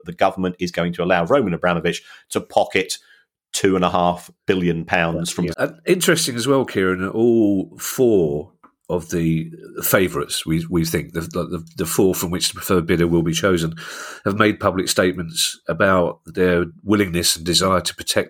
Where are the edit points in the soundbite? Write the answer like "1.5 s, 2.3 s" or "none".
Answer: 5.5 s